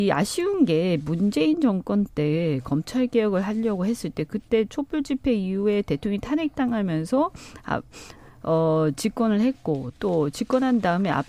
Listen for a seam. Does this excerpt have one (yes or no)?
no